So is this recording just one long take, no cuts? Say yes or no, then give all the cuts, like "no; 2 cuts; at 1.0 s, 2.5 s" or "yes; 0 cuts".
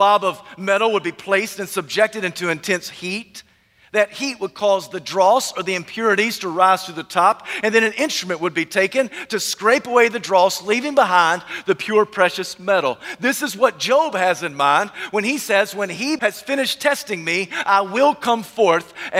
no; 1 cut; at 16.2 s